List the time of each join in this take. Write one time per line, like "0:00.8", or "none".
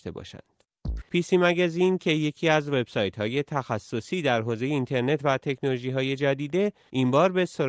0:01.0